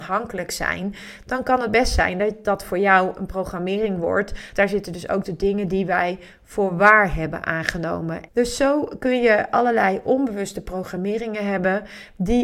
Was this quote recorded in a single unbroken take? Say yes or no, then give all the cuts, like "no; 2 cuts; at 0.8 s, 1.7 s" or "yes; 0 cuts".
no; 2 cuts; at 4.5 s, 8.3 s